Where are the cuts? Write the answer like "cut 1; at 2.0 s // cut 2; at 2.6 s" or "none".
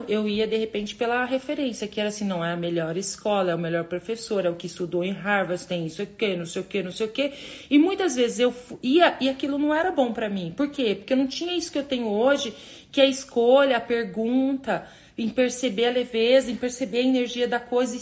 none